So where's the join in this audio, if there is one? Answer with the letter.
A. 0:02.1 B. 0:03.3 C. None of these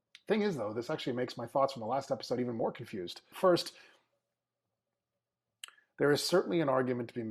B